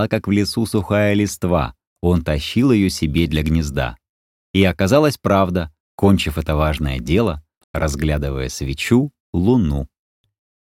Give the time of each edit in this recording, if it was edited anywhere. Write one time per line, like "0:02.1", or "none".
0:05.8
0:07.6
0:09.2